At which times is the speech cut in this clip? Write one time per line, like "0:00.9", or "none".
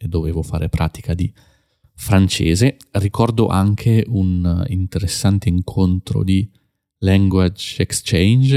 none